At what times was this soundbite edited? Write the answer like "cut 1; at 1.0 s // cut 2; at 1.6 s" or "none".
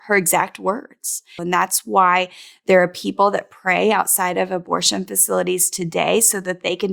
cut 1; at 1.4 s